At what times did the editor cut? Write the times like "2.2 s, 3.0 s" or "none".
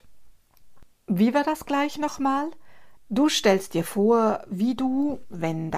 3.0 s